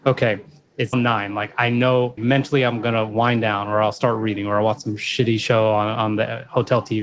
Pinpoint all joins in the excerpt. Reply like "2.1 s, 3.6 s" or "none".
0.9 s, 2.2 s